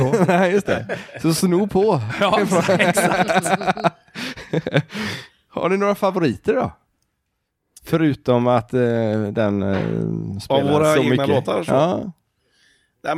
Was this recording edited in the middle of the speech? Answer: no; 0 cuts

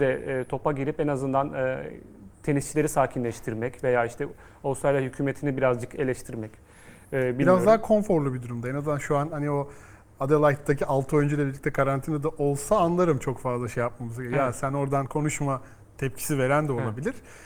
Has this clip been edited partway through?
no; 0 cuts

